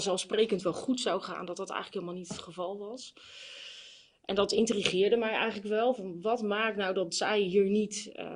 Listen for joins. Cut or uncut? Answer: uncut